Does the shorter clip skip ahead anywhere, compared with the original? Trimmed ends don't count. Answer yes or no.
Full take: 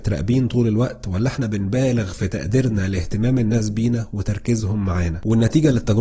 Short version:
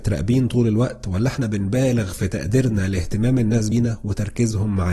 yes